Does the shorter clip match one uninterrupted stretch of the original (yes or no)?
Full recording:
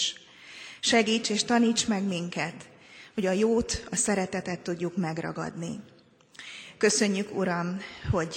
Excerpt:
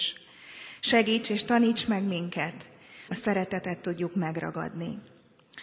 no